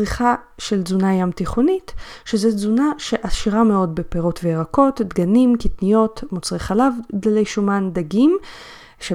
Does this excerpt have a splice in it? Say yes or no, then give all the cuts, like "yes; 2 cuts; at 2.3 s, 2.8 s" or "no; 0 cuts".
no; 0 cuts